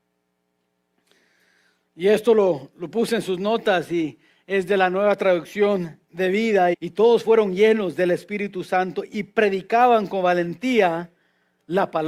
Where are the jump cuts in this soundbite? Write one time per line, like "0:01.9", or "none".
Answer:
0:06.7